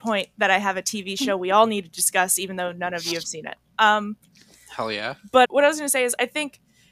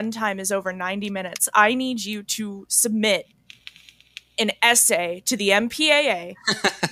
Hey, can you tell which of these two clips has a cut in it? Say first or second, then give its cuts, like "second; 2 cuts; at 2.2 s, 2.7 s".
first; 1 cut; at 5.4 s